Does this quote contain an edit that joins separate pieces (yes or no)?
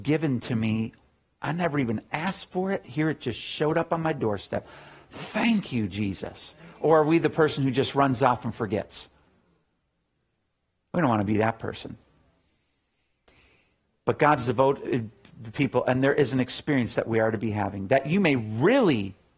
yes